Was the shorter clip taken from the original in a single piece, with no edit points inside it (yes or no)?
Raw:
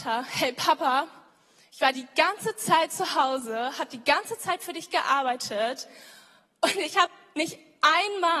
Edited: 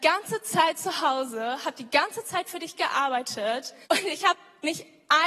no